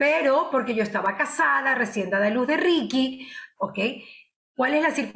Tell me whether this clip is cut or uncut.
cut